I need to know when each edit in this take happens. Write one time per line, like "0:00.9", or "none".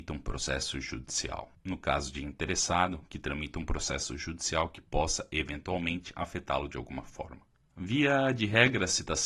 none